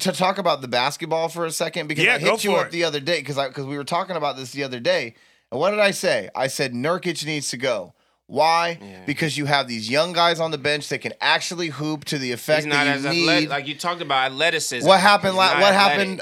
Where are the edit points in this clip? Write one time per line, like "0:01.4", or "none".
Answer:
none